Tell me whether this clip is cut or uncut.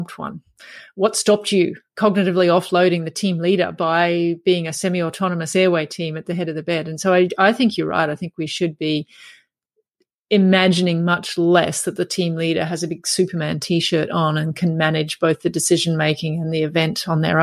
uncut